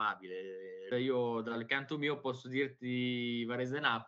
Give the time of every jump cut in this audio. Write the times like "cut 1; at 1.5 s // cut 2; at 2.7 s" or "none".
cut 1; at 0.9 s